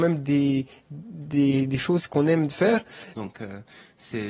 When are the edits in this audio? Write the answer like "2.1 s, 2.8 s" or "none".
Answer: 3.1 s